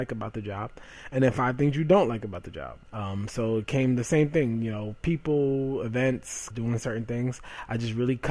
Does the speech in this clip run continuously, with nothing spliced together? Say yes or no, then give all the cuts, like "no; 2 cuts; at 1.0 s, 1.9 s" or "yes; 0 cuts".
no; 2 cuts; at 2.9 s, 6.5 s